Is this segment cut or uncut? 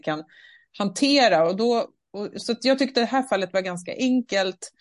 uncut